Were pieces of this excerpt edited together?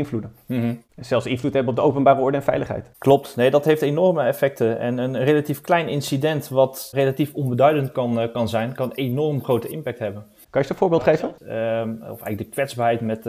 yes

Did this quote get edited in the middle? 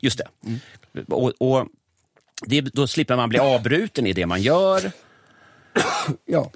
no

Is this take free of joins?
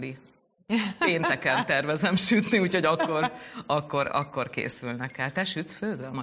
yes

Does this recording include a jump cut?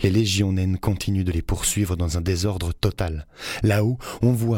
no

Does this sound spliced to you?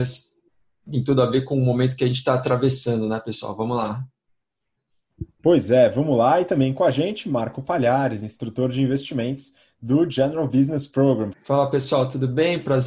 yes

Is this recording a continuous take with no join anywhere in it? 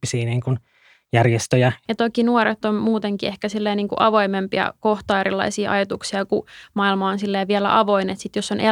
no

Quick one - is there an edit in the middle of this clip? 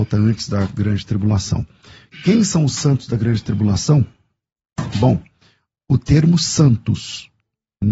no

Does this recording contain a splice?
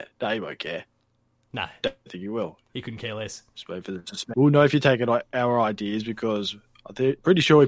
yes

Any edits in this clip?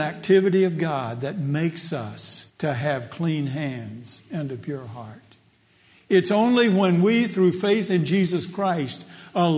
yes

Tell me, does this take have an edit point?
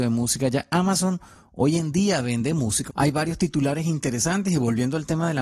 yes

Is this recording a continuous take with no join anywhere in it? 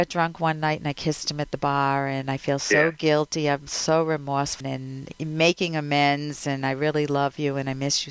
no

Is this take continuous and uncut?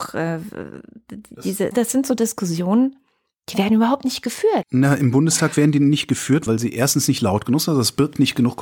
no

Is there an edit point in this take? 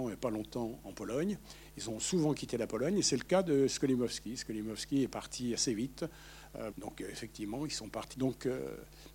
yes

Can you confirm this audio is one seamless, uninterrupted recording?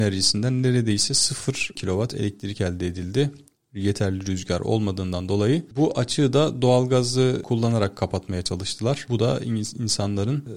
no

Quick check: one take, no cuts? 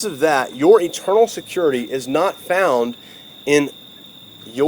yes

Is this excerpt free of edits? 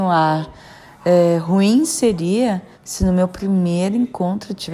no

